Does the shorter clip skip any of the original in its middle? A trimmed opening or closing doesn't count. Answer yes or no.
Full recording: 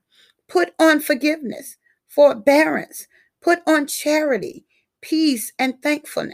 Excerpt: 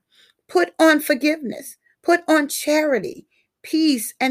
yes